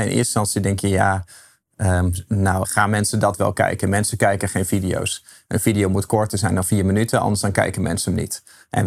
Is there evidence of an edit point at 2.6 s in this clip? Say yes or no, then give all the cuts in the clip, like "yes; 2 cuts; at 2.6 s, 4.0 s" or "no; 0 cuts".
yes; 2 cuts; at 2.6 s, 5.5 s